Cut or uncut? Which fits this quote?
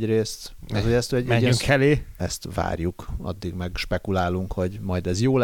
cut